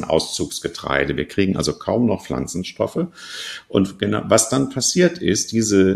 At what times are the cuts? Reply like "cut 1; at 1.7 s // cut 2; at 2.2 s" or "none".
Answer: none